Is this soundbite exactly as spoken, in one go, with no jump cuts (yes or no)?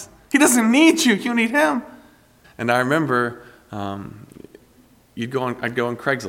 no